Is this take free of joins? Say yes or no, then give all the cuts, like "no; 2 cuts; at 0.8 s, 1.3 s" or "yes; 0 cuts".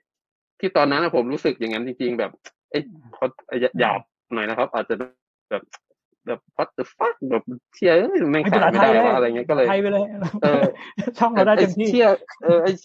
yes; 0 cuts